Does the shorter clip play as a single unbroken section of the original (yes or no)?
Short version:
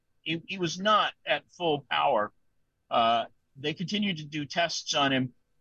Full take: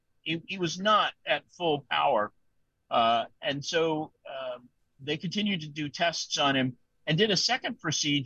no